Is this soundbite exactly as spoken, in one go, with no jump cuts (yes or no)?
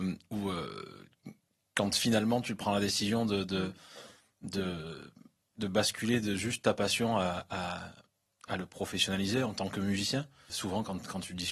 no